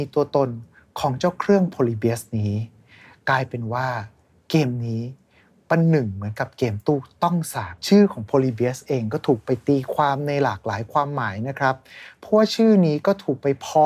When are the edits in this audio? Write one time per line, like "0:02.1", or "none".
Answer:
0:07.8